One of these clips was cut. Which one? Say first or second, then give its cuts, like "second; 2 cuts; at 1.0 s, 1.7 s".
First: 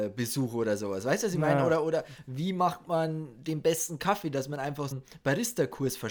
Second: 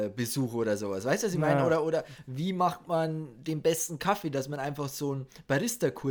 first; 1 cut; at 4.9 s